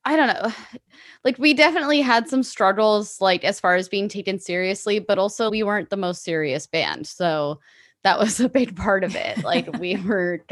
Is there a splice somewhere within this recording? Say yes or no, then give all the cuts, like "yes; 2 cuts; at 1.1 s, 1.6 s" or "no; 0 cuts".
yes; 1 cut; at 5.5 s